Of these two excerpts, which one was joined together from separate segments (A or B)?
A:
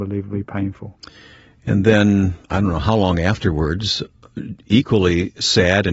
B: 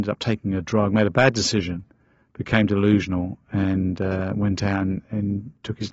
A